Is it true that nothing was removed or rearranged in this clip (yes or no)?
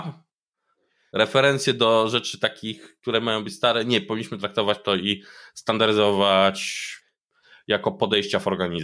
yes